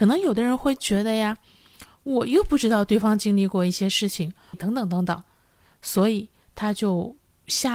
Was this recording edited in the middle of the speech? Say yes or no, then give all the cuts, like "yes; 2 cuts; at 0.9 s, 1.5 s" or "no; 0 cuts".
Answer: yes; 2 cuts; at 4.5 s, 6.5 s